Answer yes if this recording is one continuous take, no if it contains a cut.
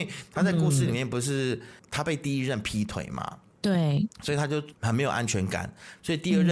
yes